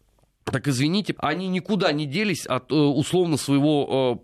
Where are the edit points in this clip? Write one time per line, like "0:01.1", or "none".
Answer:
0:01.2